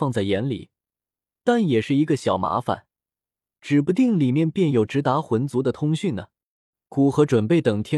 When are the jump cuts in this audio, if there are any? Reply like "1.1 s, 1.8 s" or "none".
none